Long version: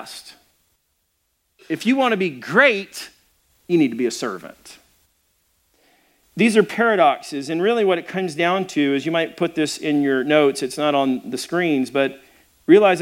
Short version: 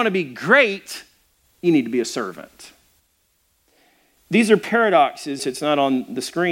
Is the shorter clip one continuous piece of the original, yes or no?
no